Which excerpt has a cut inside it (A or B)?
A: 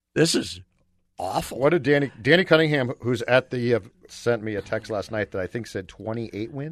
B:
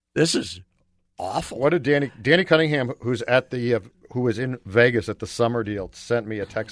A